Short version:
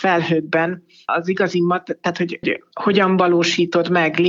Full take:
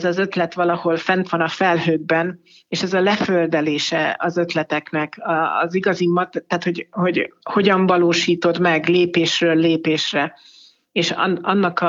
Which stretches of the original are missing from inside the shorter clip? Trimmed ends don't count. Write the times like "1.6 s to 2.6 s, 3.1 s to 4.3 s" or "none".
2.7 s to 5.5 s, 6.9 s to 7.1 s